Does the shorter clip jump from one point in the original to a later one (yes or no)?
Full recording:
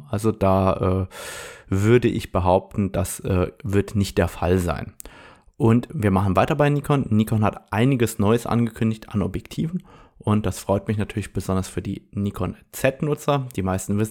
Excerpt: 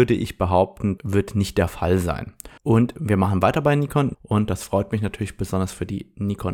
yes